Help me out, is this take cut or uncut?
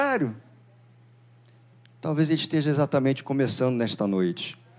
uncut